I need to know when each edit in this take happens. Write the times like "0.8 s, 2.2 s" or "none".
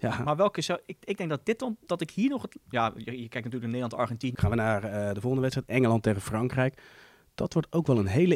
4.4 s